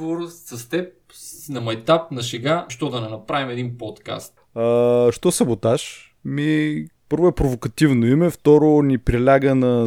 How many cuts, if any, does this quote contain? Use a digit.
3